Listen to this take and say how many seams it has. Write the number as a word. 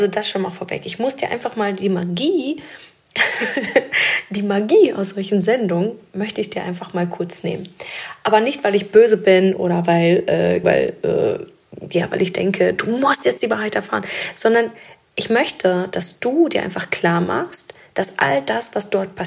one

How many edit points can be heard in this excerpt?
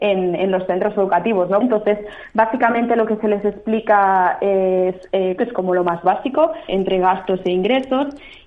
three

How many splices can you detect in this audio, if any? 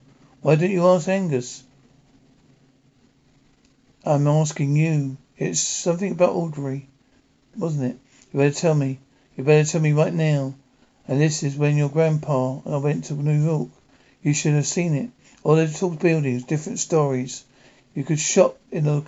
one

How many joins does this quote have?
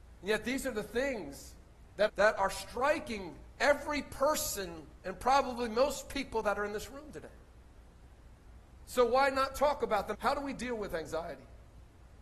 two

